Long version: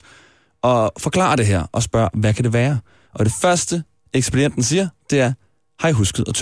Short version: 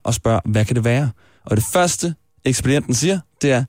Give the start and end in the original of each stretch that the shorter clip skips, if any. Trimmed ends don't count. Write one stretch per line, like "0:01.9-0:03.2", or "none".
none